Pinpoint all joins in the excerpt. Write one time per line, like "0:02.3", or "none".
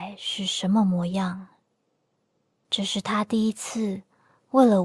0:02.6